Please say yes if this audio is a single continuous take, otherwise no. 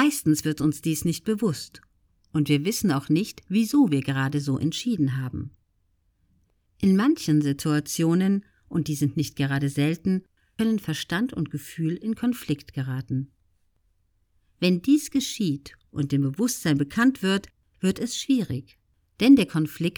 yes